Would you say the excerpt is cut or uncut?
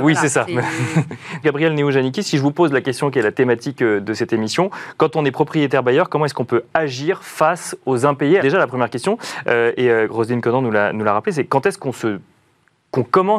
cut